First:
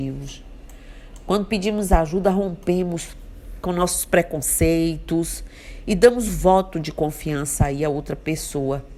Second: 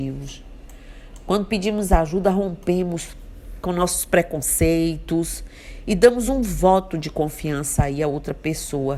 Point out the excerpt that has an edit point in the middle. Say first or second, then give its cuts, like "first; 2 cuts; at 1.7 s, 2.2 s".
first; 1 cut; at 6.3 s